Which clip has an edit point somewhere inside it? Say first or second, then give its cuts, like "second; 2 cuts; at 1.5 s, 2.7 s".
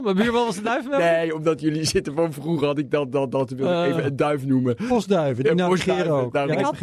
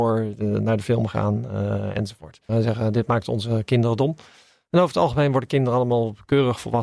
second; 1 cut; at 2.5 s